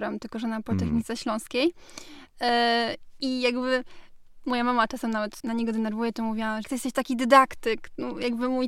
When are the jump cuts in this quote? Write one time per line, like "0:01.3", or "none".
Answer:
0:05.4
0:06.6